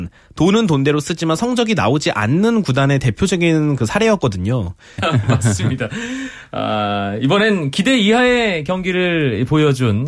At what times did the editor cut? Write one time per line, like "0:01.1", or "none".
0:05.0